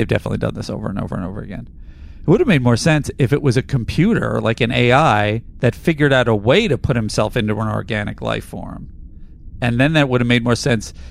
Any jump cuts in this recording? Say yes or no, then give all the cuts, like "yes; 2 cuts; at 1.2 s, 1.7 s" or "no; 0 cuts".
no; 0 cuts